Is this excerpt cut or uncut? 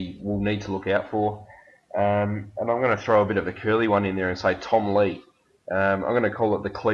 uncut